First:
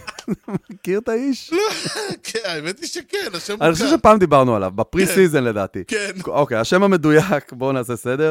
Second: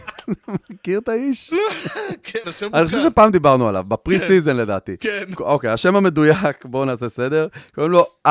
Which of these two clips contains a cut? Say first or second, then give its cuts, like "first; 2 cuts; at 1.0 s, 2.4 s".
second; 1 cut; at 2.4 s